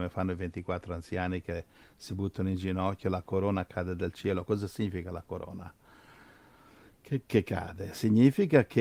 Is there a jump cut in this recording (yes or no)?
no